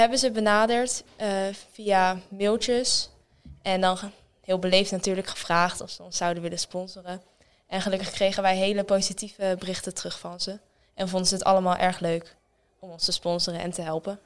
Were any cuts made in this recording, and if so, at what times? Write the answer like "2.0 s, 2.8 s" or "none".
none